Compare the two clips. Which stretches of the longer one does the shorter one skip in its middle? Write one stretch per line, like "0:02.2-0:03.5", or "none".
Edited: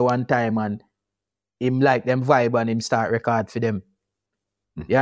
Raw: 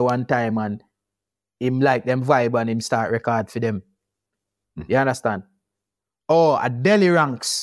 none